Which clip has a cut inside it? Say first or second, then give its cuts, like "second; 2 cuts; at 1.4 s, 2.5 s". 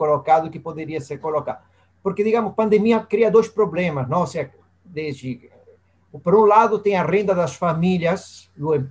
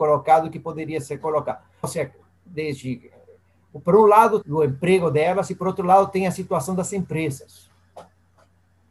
second; 2 cuts; at 1.8 s, 4.4 s